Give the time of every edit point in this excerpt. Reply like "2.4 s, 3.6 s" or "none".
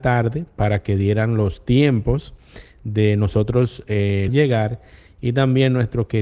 4.3 s